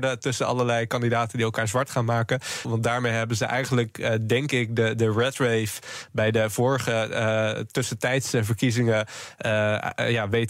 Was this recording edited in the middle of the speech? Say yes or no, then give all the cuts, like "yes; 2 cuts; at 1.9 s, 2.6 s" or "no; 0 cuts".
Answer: yes; 1 cut; at 2.6 s